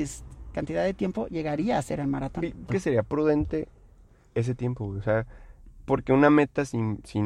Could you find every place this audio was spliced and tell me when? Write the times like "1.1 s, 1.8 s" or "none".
2.7 s